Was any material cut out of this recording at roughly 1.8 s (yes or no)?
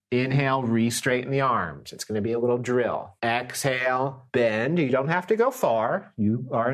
no